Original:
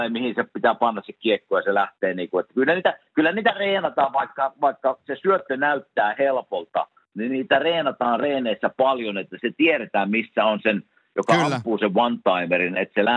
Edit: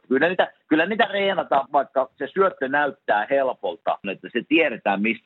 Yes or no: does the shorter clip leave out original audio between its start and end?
yes